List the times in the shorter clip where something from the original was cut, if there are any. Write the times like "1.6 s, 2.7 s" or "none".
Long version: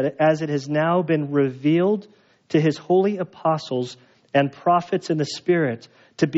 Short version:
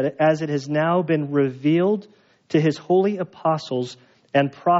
none